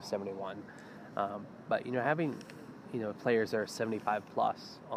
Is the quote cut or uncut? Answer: uncut